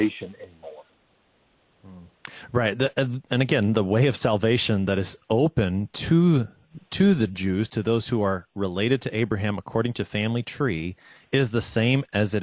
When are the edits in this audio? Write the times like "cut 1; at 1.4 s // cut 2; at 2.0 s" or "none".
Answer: none

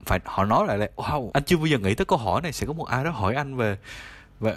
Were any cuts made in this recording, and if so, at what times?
cut 1; at 1.3 s

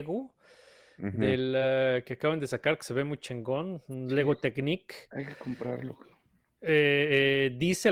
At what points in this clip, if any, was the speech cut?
none

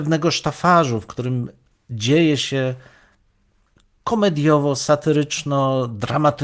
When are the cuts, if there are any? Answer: none

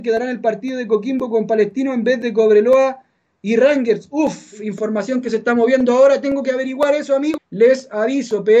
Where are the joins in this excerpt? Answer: cut 1; at 7.4 s

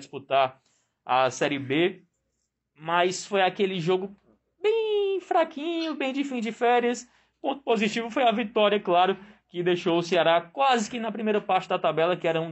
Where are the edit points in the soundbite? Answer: none

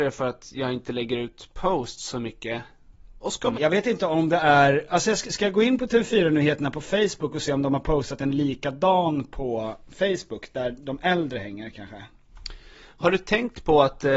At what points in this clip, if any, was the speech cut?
cut 1; at 3.5 s

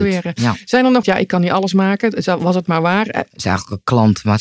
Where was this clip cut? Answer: cut 1; at 1.0 s // cut 2; at 3.3 s

